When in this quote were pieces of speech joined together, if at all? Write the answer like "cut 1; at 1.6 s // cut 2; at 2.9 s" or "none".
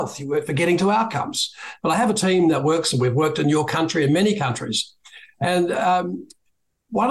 cut 1; at 1.8 s